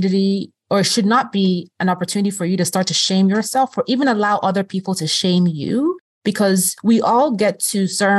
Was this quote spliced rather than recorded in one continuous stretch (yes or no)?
no